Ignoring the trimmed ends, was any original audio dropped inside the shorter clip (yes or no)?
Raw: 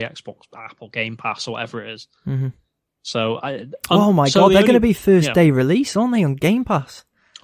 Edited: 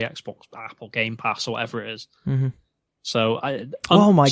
no